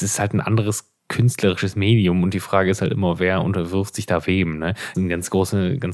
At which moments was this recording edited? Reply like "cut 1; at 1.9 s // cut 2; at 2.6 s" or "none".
cut 1; at 1.0 s // cut 2; at 4.9 s

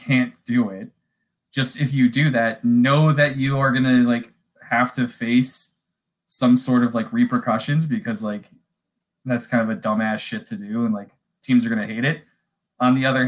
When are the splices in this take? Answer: none

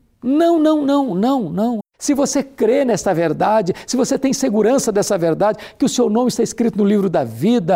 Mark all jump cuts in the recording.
cut 1; at 1.8 s

